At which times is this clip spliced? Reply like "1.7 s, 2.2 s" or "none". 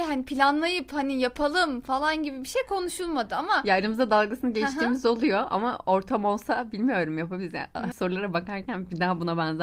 7.9 s